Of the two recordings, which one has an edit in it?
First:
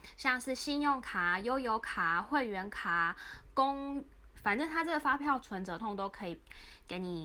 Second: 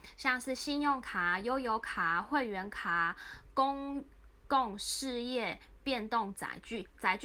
first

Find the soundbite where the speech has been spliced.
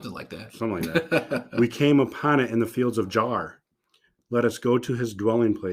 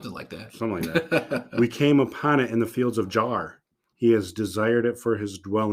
second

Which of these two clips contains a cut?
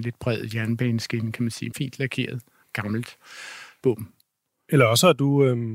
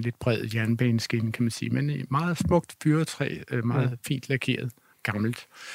first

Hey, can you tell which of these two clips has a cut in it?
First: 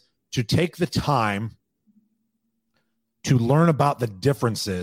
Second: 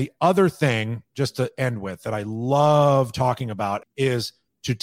second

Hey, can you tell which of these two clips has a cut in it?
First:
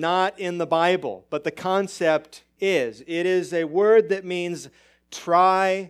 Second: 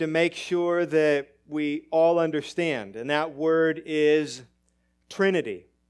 first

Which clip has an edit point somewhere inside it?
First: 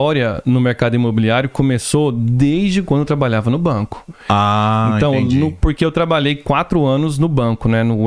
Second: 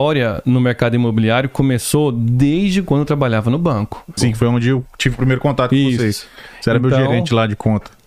second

